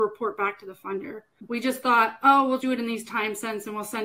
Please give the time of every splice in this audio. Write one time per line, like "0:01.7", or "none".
0:01.5
0:02.6